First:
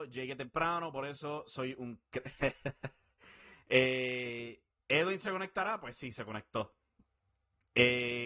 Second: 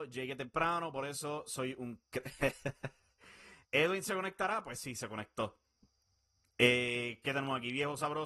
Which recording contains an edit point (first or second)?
second